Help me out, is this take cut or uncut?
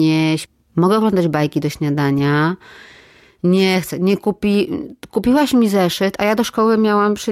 uncut